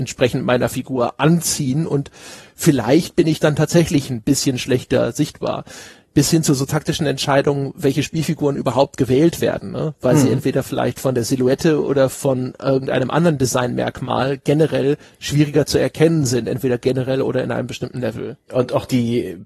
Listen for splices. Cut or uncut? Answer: cut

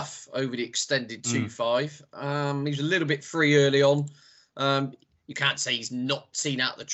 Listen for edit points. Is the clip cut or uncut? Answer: uncut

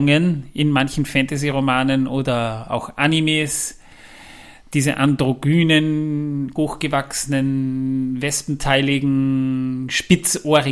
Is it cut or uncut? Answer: cut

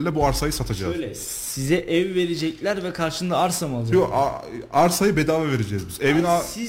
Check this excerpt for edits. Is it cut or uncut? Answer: uncut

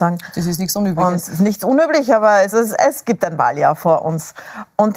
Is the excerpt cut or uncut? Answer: cut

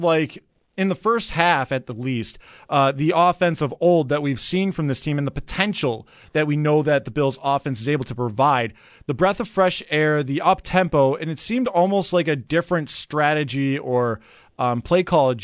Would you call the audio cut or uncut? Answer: uncut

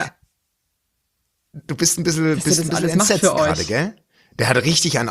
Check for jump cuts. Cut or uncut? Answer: uncut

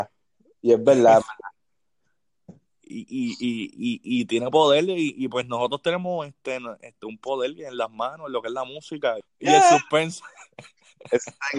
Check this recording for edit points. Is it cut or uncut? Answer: cut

